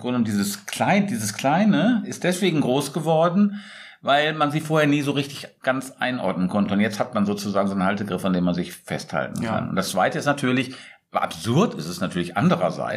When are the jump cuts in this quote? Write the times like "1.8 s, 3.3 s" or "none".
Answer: none